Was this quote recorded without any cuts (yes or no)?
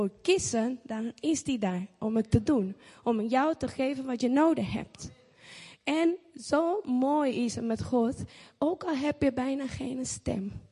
yes